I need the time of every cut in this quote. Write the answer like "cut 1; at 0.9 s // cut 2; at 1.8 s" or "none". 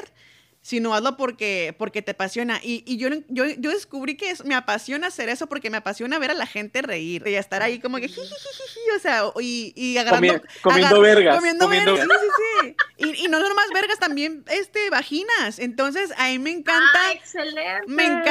cut 1; at 7.3 s // cut 2; at 12.0 s